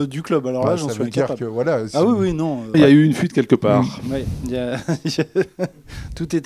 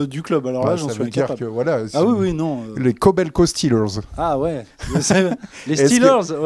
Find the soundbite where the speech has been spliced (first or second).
first